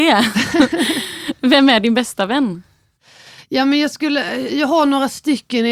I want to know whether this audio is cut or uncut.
uncut